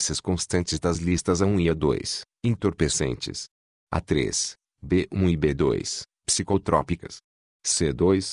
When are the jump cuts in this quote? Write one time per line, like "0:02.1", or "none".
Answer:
none